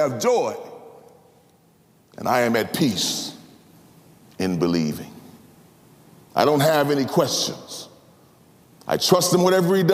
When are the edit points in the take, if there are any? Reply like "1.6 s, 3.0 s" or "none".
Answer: 6.2 s